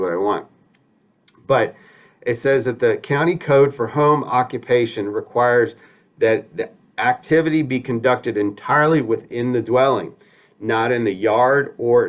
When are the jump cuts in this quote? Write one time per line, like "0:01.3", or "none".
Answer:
none